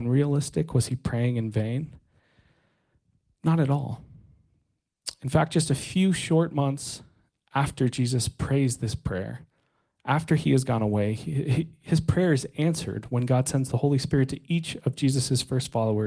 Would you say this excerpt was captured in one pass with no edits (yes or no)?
yes